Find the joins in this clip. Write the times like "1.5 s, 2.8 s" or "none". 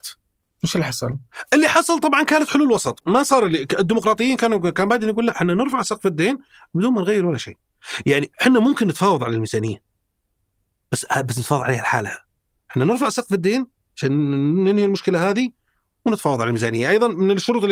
none